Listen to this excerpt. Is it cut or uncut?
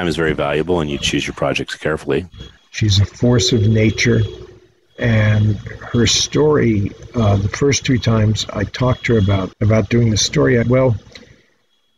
cut